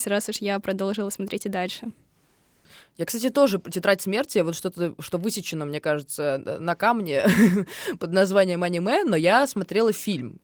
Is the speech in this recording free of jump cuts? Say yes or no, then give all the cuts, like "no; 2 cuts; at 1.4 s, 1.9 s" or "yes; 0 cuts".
yes; 0 cuts